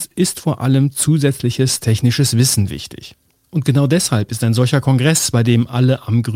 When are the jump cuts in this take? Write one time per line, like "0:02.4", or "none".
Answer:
none